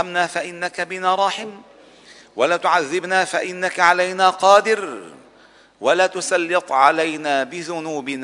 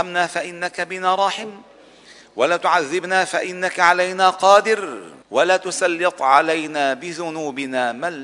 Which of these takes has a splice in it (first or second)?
second